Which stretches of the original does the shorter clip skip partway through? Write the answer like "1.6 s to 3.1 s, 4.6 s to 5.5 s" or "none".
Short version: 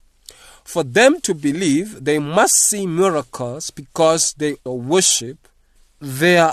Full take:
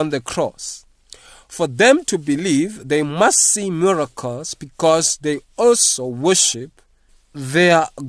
5.5 s to 6.0 s